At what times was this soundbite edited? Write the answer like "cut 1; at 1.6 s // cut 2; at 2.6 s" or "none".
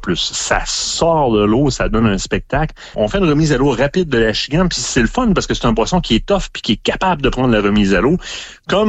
cut 1; at 2.9 s